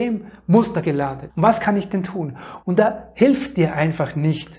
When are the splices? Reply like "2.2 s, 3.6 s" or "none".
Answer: 1.3 s, 2.6 s